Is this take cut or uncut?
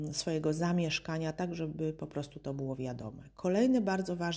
uncut